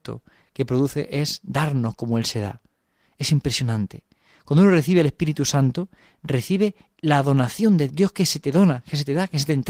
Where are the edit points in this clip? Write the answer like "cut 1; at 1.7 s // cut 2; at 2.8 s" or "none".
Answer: cut 1; at 7.9 s